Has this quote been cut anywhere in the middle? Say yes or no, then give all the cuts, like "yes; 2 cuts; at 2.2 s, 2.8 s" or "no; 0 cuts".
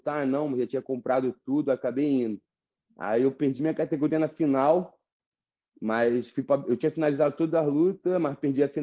no; 0 cuts